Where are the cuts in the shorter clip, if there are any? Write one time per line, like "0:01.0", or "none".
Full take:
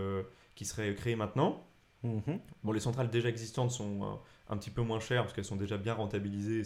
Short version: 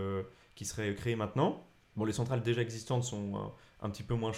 0:01.9